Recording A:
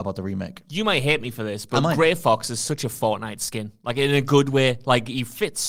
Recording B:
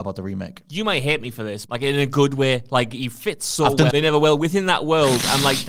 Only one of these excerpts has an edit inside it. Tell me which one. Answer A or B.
B